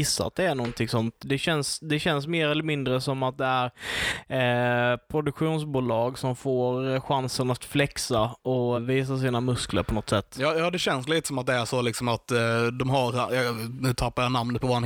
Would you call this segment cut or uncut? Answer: cut